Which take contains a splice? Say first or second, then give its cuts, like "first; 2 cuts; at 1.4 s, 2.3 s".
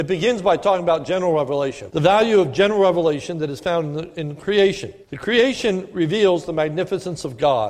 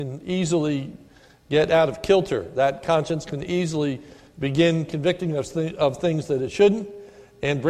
first; 2 cuts; at 1.9 s, 5.0 s